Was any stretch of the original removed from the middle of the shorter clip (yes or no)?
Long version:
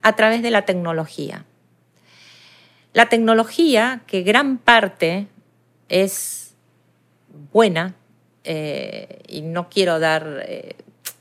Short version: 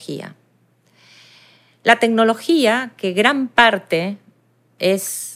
no